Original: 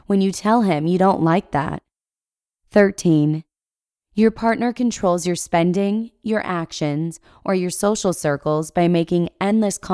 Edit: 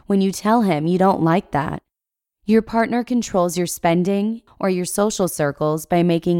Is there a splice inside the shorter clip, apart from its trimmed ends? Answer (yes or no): yes